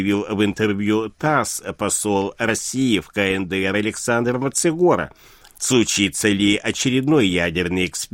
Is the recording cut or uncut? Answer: cut